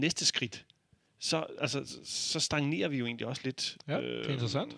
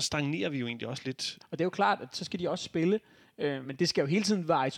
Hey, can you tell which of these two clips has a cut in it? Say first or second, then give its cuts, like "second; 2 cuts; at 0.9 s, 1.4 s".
second; 2 cuts; at 1.4 s, 3.6 s